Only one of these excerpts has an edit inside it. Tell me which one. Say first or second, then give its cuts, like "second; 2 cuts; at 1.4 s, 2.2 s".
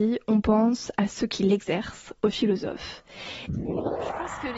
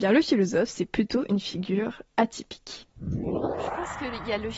first; 1 cut; at 3.5 s